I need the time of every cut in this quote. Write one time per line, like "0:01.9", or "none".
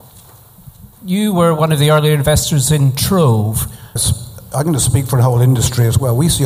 0:00.9
0:04.0